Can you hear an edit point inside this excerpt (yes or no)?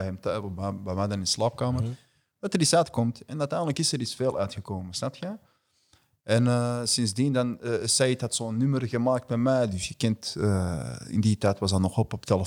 no